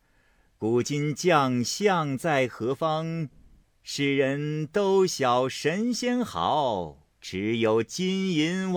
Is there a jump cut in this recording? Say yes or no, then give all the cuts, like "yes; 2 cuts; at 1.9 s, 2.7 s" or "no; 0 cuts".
yes; 2 cuts; at 3.6 s, 7.1 s